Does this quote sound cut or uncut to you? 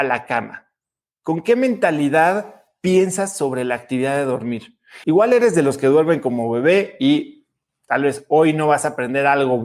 cut